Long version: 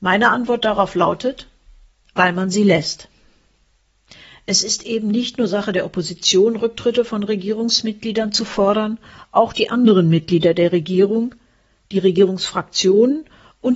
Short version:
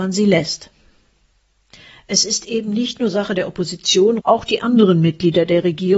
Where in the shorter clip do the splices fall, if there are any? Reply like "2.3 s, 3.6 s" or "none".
4.2 s

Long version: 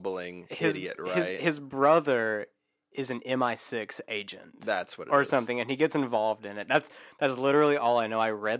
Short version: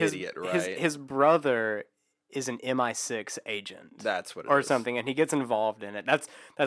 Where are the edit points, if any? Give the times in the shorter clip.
none

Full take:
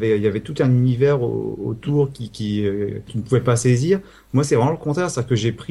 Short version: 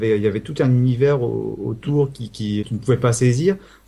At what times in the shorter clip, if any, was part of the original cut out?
2.6 s

